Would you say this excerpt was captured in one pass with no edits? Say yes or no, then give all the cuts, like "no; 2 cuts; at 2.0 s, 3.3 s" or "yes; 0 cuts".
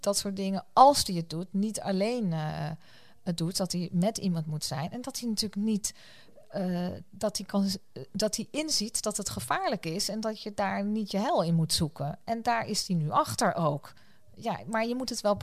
yes; 0 cuts